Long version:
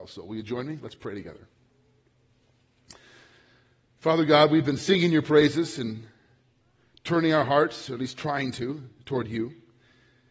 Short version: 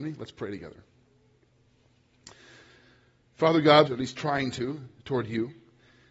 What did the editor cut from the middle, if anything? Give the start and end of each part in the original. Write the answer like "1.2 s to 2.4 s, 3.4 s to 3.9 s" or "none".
4.5 s to 7.9 s